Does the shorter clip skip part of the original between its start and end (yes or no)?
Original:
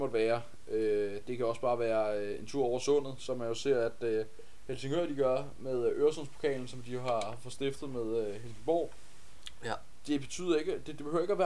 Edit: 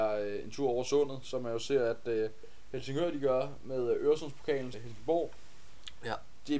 yes